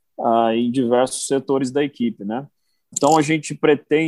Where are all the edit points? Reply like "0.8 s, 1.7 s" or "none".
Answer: 2.9 s